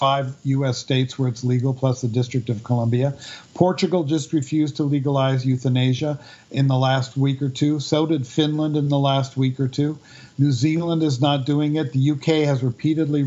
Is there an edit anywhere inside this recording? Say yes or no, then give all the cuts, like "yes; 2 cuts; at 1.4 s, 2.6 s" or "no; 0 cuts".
no; 0 cuts